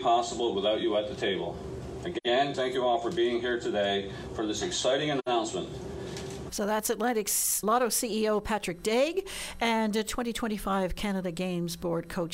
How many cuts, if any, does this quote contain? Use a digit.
3